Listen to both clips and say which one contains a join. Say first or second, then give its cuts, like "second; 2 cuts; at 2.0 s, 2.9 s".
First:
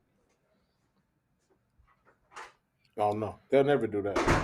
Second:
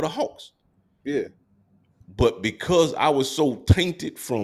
first; 1 cut; at 2.9 s